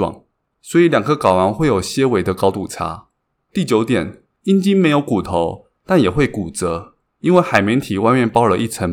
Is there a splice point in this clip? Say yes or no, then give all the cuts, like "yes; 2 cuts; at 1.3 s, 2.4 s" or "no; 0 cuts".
no; 0 cuts